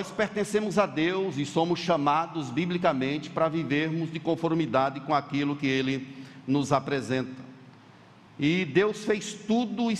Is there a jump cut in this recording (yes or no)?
yes